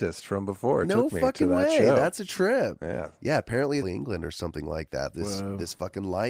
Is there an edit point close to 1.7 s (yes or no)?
no